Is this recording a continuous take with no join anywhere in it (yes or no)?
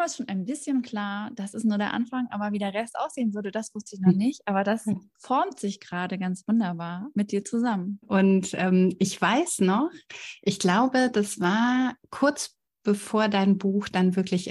no